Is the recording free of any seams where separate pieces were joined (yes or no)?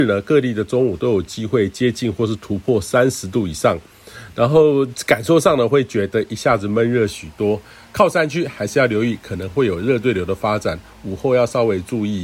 yes